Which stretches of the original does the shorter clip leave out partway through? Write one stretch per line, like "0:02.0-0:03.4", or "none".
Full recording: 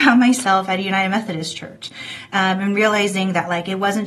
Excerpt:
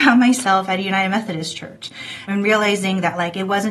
0:02.3-0:02.6